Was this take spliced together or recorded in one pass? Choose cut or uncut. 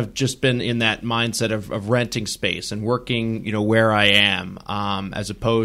uncut